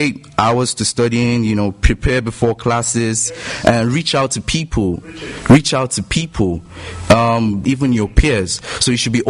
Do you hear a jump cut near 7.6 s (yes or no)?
yes